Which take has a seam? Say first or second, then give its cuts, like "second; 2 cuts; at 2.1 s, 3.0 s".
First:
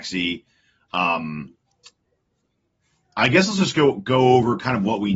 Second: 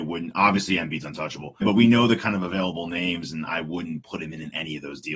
second; 1 cut; at 1.6 s